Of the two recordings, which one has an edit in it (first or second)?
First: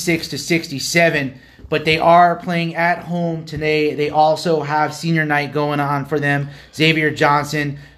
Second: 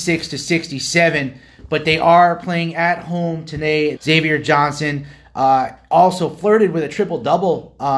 second